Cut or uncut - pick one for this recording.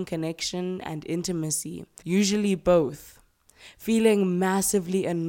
cut